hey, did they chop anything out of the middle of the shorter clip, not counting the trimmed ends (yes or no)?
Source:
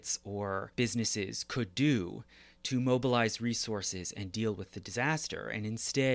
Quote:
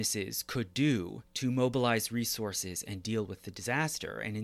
yes